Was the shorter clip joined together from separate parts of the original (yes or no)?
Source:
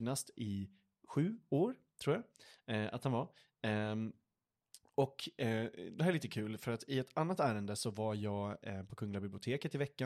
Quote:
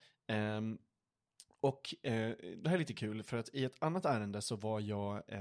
no